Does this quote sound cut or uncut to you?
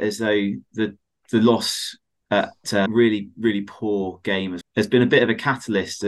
cut